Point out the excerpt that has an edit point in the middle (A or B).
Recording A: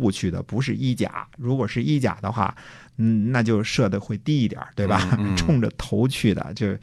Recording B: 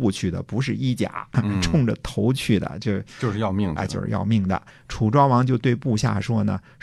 B